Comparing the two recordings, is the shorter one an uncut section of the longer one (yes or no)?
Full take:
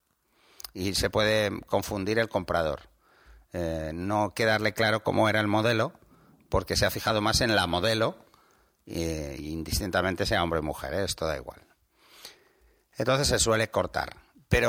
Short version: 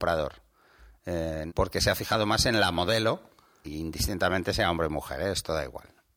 no